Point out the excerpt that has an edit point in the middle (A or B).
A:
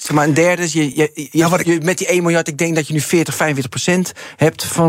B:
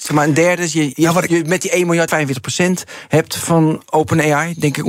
B